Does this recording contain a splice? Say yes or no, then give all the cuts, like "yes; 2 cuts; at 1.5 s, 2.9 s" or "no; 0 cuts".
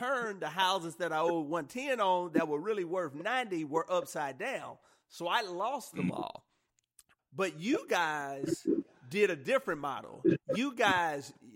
yes; 1 cut; at 7.2 s